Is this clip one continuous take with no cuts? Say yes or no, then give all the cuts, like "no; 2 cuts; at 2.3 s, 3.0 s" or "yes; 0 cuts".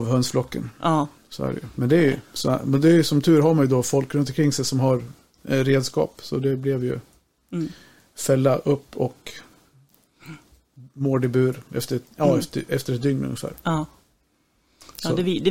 yes; 0 cuts